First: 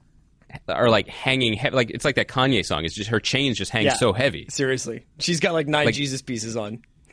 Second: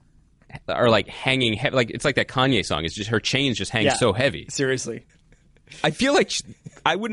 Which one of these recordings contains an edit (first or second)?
second